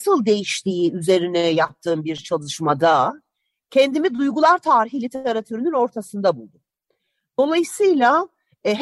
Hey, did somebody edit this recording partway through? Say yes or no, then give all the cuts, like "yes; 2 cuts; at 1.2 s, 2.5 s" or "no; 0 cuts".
no; 0 cuts